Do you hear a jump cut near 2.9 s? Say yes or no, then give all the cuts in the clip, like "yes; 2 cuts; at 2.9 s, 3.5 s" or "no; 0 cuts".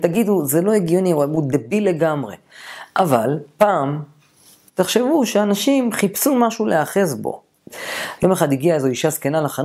no; 2 cuts; at 4.7 s, 8.2 s